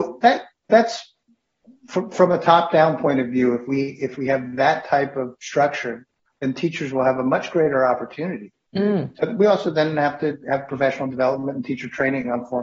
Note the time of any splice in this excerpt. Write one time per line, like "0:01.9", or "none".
0:09.2